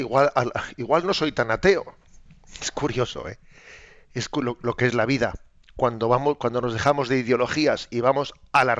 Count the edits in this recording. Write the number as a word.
zero